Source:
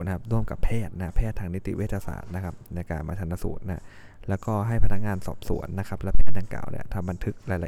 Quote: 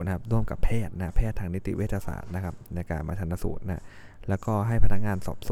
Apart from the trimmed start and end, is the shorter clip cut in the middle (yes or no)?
no